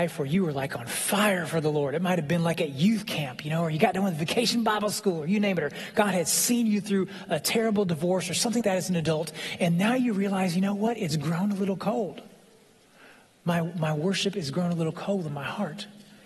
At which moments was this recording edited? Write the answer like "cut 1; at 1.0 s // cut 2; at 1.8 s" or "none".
cut 1; at 8.6 s